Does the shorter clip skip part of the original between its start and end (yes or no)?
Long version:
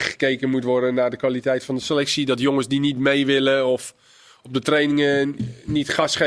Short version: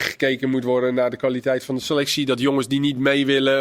no